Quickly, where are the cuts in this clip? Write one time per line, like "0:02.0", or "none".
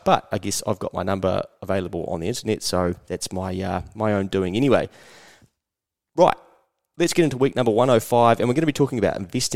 none